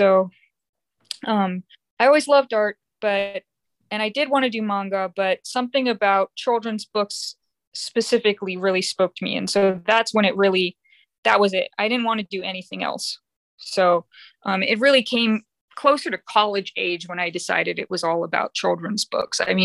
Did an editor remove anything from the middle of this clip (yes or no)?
no